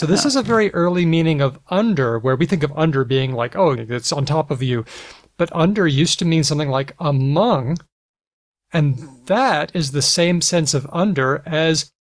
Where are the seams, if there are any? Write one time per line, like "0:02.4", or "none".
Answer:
0:03.7